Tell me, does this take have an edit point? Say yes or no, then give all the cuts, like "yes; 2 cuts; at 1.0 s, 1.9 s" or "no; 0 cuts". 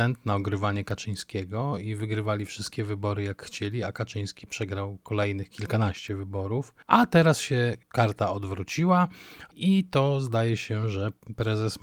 no; 0 cuts